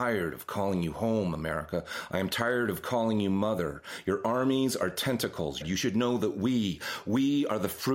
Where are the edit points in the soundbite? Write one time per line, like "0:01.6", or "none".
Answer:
0:05.6

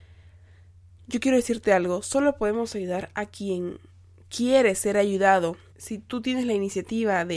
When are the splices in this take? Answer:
0:05.7

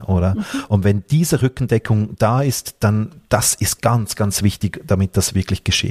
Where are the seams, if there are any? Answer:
none

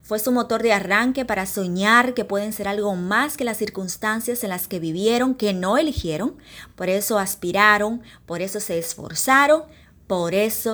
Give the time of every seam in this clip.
none

